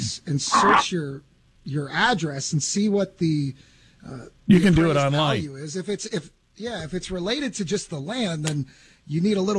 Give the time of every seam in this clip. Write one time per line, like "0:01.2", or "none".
none